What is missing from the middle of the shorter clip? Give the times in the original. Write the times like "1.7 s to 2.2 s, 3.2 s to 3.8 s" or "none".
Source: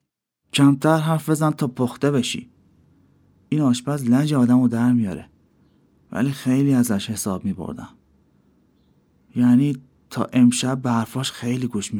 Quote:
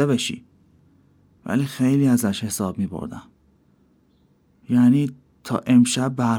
3.4 s to 6.0 s